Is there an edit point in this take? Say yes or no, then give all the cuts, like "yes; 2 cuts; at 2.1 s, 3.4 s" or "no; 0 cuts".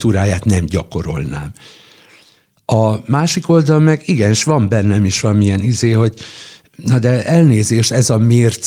no; 0 cuts